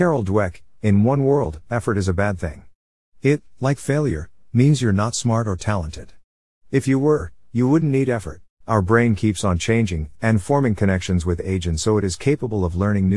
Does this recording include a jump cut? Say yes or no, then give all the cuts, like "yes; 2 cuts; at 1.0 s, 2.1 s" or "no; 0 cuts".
yes; 2 cuts; at 8.6 s, 10.1 s